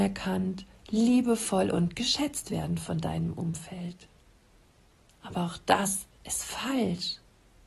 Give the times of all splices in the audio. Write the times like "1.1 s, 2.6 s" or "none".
6.1 s